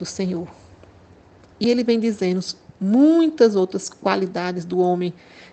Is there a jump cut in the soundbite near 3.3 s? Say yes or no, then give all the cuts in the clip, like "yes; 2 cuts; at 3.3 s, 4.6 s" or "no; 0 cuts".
no; 1 cut; at 1.6 s